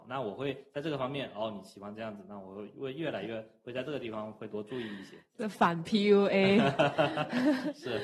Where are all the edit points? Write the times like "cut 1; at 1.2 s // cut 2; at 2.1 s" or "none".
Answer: none